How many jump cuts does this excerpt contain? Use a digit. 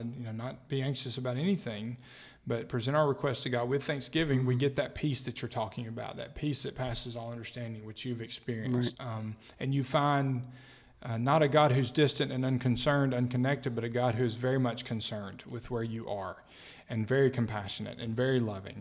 1